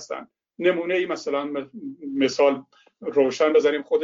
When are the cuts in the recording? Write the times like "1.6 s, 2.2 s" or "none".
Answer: none